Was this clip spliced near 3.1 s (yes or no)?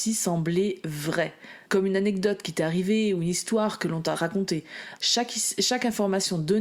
no